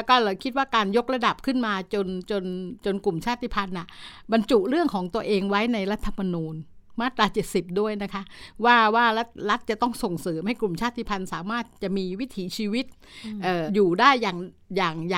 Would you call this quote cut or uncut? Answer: cut